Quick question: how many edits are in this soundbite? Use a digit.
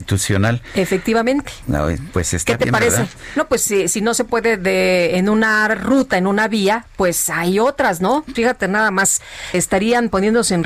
2